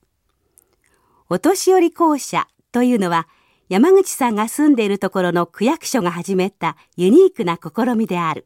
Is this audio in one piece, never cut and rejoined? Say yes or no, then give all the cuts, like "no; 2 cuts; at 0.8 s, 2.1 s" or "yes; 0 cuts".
yes; 0 cuts